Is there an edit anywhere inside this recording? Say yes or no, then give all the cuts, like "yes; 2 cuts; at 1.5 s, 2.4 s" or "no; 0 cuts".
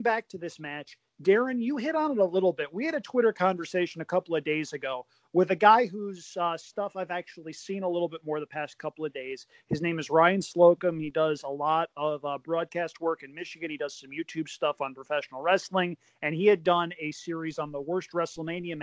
no; 0 cuts